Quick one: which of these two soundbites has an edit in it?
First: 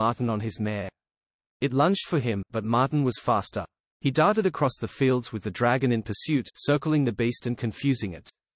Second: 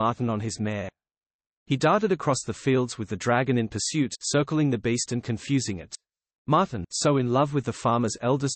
second; 2 cuts; at 1.5 s, 6.3 s

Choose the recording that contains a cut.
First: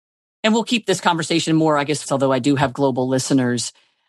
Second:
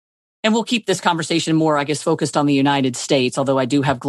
first; 1 cut; at 2.0 s

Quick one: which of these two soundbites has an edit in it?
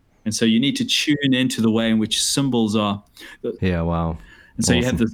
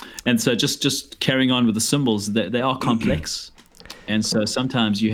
first; 1 cut; at 3.6 s

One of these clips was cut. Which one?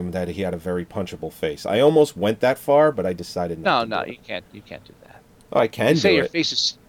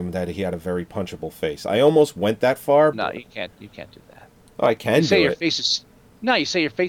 second; 1 cut; at 2.9 s

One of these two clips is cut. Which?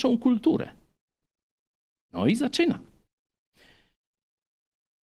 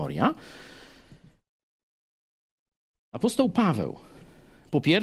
first; 1 cut; at 2.0 s

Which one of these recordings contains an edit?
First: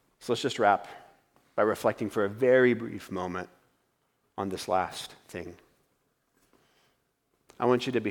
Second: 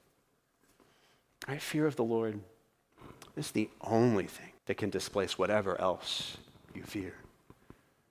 second; 2 cuts; at 1.3 s, 4.6 s

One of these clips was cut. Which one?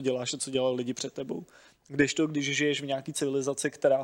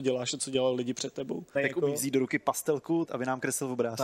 second; 2 cuts; at 1.6 s, 3.1 s

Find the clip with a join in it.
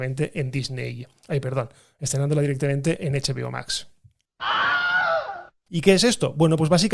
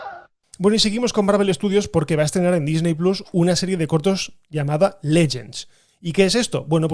first; 1 cut; at 5.7 s

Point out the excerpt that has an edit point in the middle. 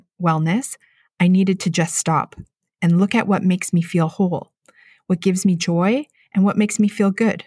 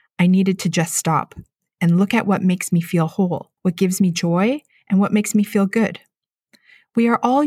second; 1 cut; at 3.6 s

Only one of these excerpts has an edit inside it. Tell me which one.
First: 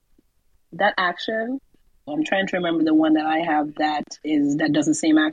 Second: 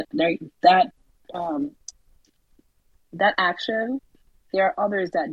first; 1 cut; at 2.1 s

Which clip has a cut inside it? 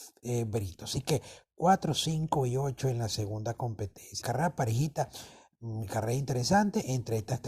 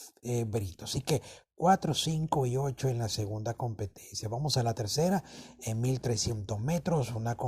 first; 1 cut; at 4.2 s

